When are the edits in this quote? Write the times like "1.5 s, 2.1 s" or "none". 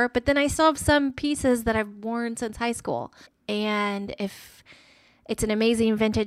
3.3 s